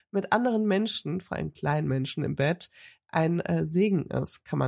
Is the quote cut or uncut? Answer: uncut